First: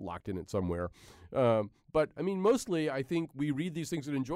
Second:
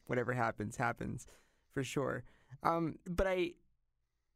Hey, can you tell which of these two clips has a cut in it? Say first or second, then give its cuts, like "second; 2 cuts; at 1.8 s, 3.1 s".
second; 1 cut; at 3.0 s